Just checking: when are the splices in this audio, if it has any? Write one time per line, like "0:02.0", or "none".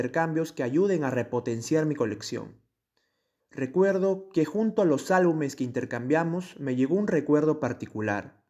0:03.4